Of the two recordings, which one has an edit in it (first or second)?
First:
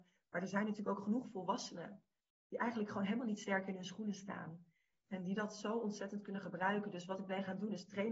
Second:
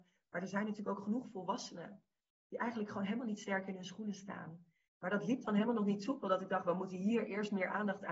second